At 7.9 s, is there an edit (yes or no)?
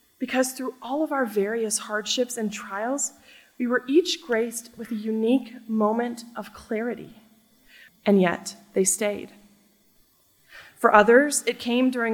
yes